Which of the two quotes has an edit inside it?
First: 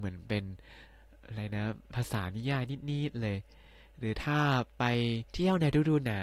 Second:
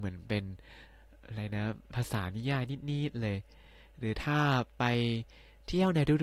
first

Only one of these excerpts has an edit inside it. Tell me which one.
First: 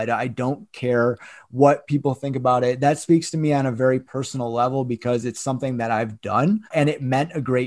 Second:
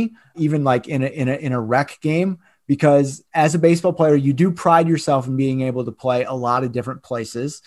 first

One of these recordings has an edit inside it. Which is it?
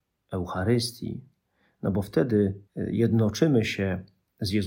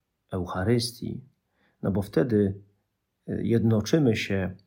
first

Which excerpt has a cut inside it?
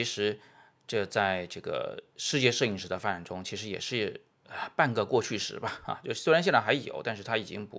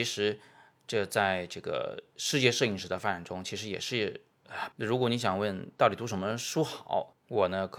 second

